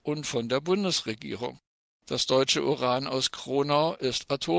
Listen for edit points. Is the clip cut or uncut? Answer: cut